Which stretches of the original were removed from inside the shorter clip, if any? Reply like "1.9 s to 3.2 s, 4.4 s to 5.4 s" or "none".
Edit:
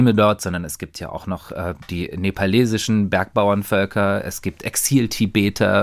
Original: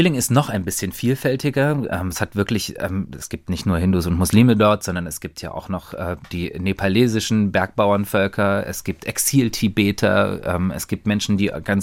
none